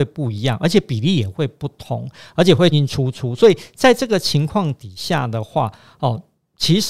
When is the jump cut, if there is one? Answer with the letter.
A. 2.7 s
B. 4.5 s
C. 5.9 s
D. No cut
A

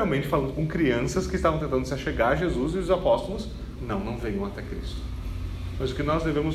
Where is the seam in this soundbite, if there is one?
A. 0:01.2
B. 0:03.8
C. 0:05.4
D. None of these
B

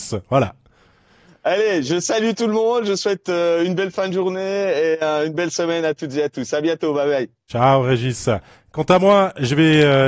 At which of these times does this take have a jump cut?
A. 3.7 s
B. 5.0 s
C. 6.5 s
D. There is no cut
D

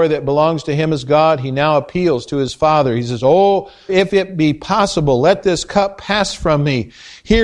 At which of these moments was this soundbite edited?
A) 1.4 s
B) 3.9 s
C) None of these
B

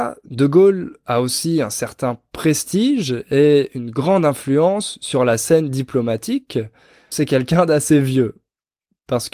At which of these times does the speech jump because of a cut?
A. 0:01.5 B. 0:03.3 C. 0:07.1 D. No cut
C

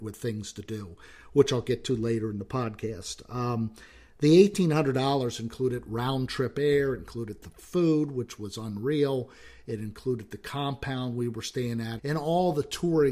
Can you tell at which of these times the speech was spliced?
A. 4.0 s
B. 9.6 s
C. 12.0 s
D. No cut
C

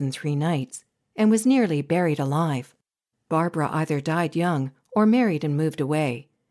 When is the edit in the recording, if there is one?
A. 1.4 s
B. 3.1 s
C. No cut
C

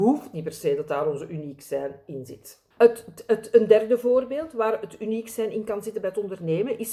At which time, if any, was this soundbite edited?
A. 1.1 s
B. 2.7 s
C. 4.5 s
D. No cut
B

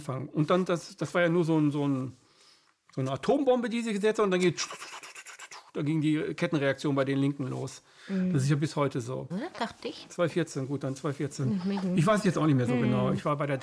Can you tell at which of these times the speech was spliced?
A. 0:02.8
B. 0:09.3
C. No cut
B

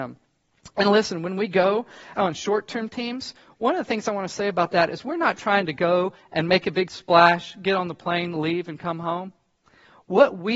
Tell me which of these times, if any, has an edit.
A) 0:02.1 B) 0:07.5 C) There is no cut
A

